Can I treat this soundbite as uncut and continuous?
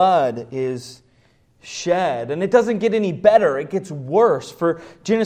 yes; 0 cuts

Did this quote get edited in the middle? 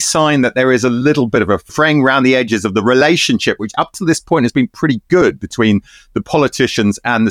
no; 0 cuts

